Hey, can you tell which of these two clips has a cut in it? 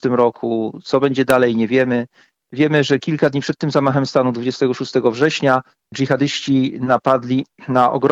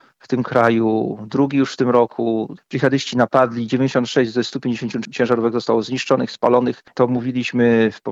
second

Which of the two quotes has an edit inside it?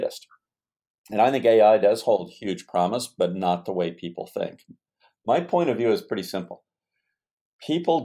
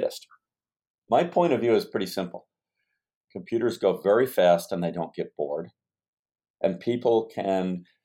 second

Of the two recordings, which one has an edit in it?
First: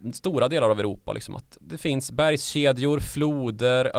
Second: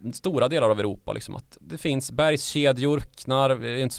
second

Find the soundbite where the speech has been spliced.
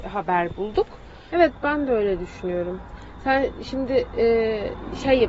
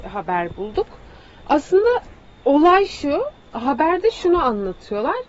first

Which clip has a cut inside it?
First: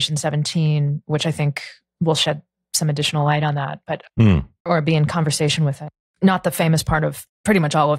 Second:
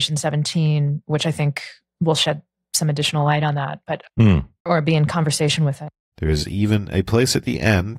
second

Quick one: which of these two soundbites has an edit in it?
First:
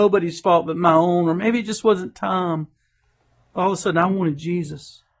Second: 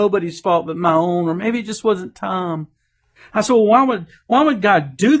second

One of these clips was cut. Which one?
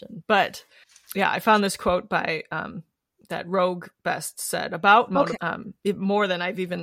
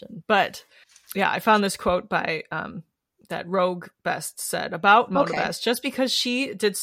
first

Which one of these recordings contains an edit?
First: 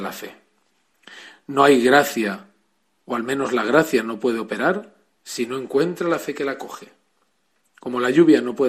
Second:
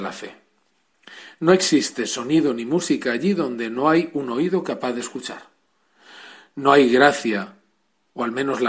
first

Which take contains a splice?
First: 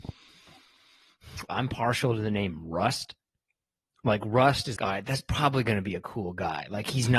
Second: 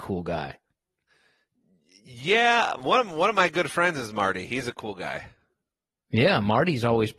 first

